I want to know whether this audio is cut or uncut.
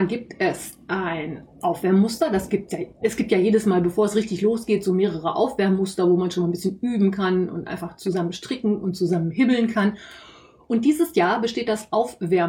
uncut